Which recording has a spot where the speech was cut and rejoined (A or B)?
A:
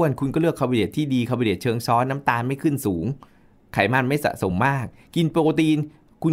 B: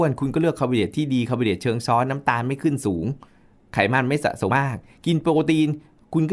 B